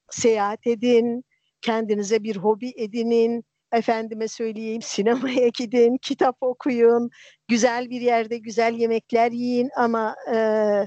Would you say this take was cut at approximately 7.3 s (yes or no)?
no